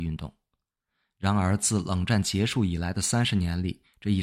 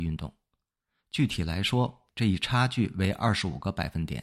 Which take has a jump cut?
second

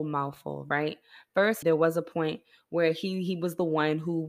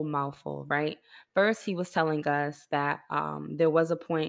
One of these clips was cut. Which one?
first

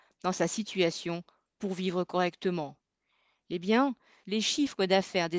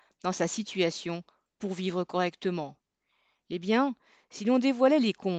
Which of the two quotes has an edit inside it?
first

